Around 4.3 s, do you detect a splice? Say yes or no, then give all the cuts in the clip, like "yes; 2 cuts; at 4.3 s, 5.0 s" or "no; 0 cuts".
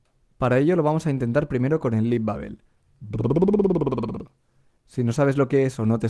no; 0 cuts